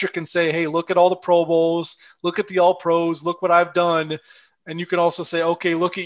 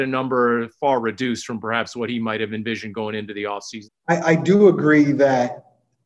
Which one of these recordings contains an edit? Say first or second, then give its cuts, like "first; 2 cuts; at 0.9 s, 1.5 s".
second; 1 cut; at 3.9 s